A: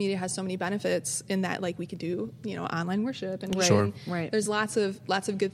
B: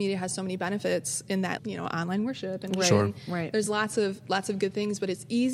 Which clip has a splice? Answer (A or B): B